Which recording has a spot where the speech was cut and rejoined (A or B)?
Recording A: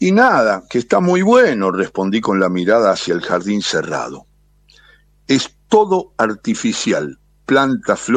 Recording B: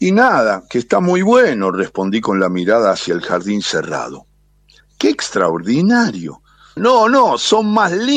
B